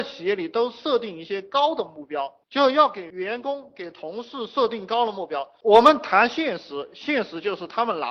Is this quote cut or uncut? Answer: uncut